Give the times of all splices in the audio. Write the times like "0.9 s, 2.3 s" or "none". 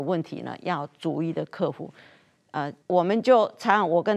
2.8 s